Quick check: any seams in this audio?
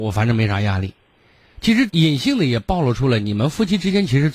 yes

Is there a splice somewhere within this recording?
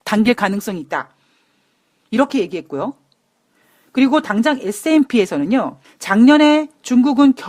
yes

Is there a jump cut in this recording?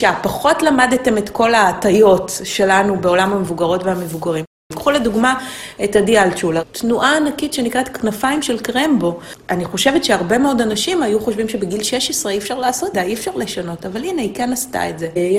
yes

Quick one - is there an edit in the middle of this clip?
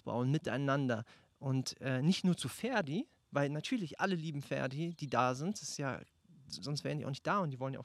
no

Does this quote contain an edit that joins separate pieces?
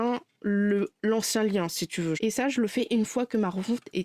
yes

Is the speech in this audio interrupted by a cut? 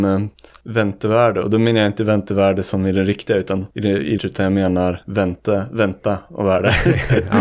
yes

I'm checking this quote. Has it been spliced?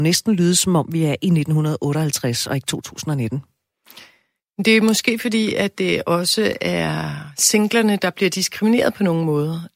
no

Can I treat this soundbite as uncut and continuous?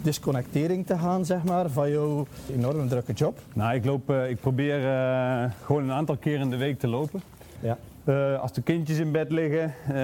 no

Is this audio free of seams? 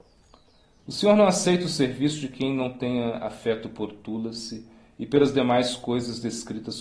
yes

